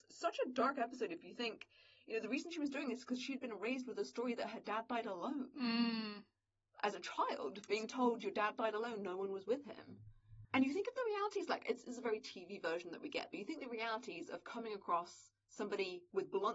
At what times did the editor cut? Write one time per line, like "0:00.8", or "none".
0:10.4